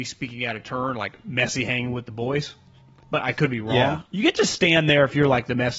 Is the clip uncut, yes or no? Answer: no